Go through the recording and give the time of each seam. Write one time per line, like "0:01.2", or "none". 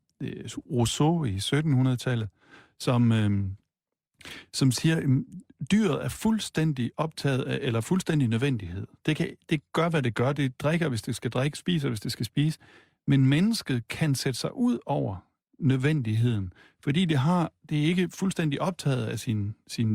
none